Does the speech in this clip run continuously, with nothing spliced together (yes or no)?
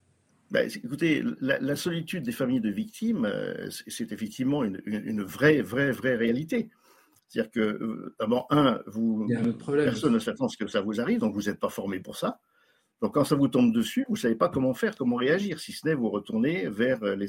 yes